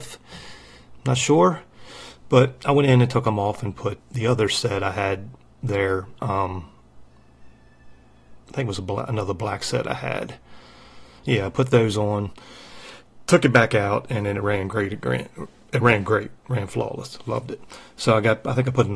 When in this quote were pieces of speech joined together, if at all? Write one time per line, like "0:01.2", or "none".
0:04.0